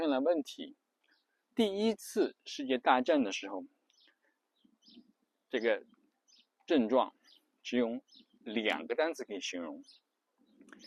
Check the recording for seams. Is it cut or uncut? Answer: cut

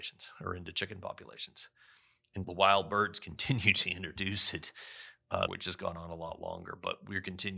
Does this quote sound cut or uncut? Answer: cut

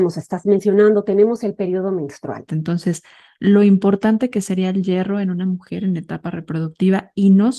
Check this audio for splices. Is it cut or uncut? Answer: cut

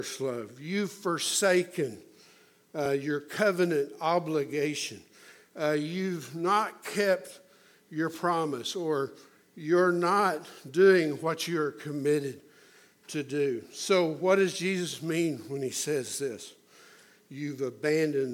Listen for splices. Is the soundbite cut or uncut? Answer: uncut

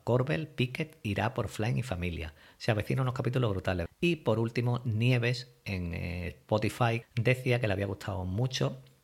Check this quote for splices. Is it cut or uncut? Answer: cut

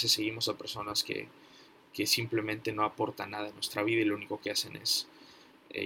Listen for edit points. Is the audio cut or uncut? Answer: uncut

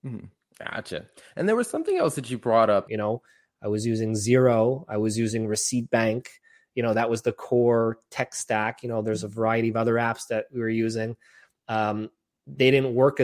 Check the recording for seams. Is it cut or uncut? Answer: cut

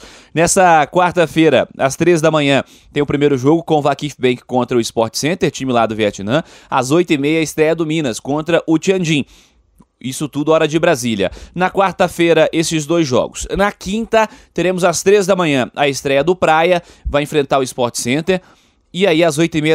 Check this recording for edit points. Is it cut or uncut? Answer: uncut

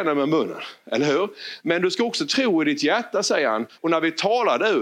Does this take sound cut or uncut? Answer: cut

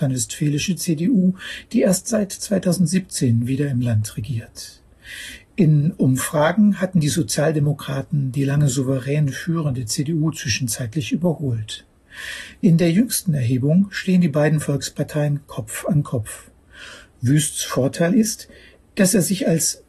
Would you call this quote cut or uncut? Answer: uncut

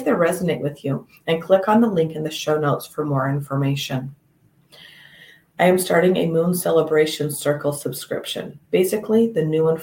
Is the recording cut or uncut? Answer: cut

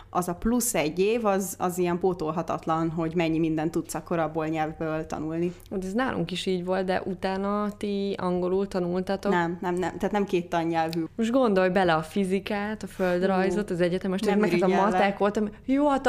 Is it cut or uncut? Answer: cut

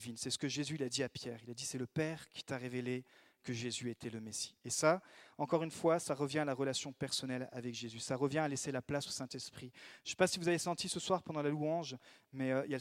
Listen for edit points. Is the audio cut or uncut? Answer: uncut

